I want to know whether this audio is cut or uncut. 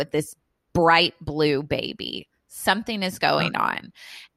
uncut